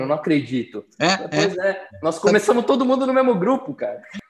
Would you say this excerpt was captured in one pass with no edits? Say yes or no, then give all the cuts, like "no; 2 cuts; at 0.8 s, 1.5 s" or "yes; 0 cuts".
yes; 0 cuts